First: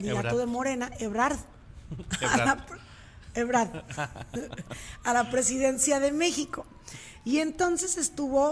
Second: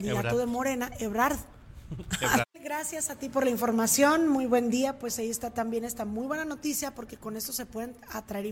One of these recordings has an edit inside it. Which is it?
second; 1 cut; at 2.4 s

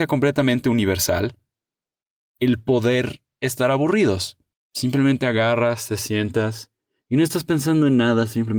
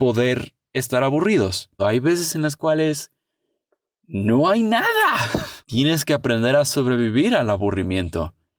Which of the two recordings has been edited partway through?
second; 2 cuts; at 1.8 s, 5.6 s

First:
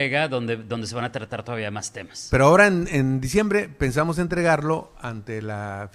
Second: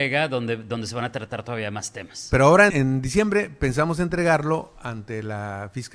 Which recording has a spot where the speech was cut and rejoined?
second; 1 cut; at 2.7 s

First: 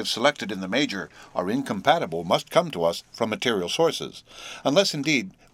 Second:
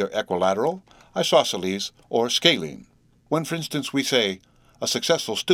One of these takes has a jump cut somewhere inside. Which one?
second; 1 cut; at 3.3 s

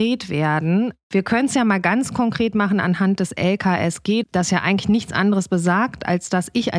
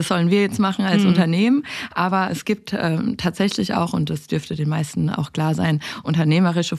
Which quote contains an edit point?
first; 1 cut; at 4.2 s

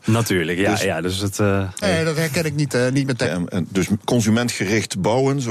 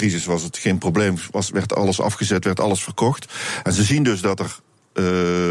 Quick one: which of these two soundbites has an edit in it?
first; 2 cuts; at 1.8 s, 3.2 s

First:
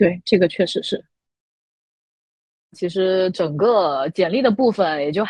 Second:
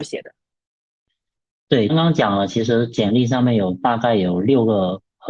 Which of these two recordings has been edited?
second; 1 cut; at 1.9 s

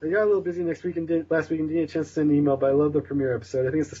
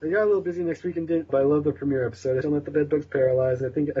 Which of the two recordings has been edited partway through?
second; 2 cuts; at 1.3 s, 2.4 s

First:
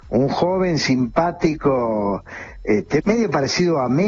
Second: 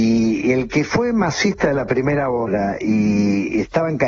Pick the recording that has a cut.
first; 1 cut; at 3.0 s

